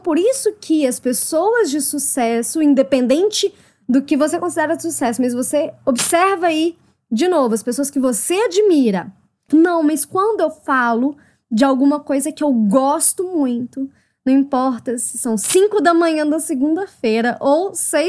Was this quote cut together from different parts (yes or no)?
yes